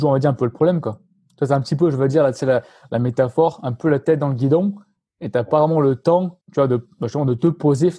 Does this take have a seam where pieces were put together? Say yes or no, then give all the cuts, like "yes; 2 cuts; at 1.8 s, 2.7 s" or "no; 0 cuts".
yes; 1 cut; at 6.4 s